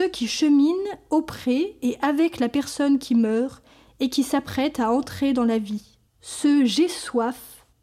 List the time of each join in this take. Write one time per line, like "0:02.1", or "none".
0:06.1